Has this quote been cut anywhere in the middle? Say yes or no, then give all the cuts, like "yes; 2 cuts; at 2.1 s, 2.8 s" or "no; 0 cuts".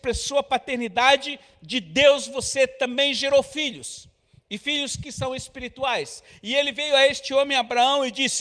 no; 0 cuts